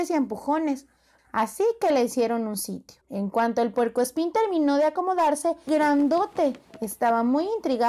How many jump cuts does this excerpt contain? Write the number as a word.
three